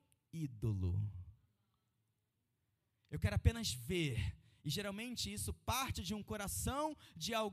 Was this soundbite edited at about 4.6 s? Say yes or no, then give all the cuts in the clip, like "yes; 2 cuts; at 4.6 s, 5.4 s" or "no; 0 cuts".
no; 0 cuts